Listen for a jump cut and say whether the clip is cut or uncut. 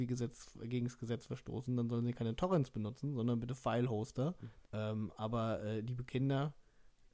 cut